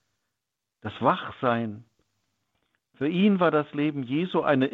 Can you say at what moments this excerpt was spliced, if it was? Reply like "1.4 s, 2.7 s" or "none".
none